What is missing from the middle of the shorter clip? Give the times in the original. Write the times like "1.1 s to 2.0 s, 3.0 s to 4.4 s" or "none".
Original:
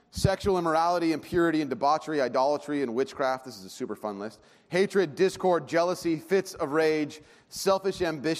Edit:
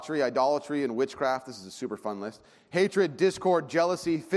none